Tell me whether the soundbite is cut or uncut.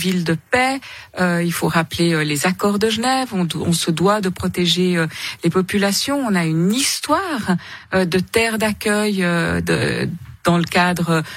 uncut